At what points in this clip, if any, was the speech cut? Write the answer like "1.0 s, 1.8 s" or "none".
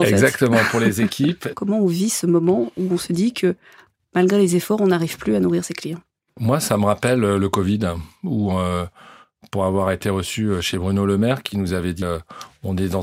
1.5 s, 12.0 s